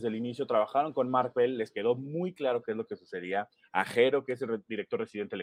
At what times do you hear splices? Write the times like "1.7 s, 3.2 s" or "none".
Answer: none